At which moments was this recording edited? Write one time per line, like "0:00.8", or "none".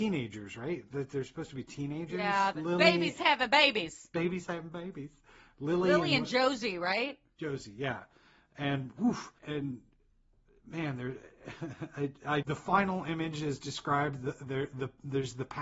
0:02.5
0:09.4
0:12.4